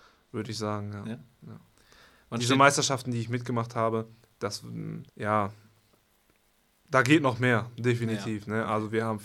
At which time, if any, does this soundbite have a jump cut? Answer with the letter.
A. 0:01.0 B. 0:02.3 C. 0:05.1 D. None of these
C